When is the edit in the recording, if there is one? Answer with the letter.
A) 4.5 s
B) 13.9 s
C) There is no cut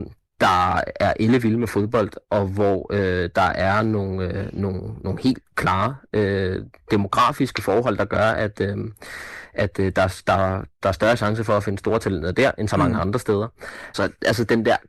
B